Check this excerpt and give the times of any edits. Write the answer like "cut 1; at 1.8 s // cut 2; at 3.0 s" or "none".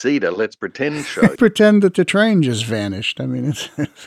cut 1; at 1.4 s